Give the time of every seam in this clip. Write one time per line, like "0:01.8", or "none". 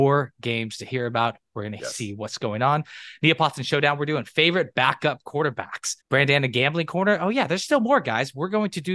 0:06.0